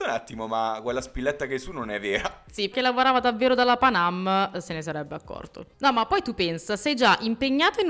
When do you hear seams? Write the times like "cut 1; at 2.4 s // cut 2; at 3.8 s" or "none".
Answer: cut 1; at 2.7 s // cut 2; at 5.7 s